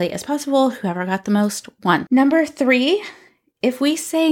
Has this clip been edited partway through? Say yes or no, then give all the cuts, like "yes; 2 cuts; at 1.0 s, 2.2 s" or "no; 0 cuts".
yes; 1 cut; at 2.1 s